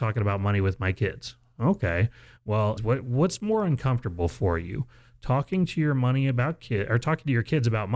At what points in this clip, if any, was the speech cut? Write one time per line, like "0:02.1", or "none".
0:02.8